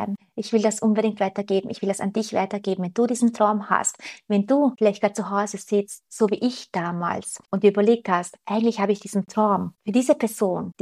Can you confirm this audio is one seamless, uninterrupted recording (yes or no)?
yes